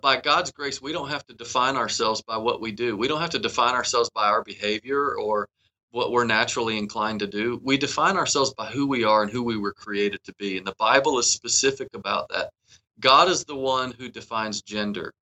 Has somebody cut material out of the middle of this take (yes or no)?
no